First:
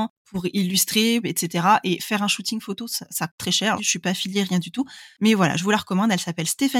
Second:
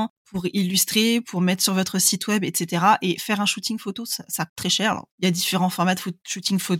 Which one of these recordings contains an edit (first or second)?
first